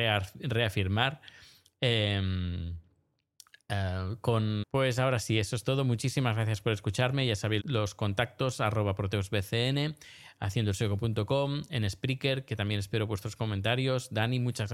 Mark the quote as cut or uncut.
cut